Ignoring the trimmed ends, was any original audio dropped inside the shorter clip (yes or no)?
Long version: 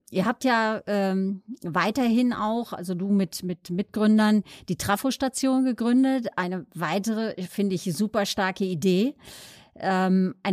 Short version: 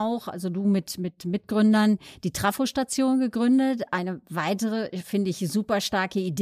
no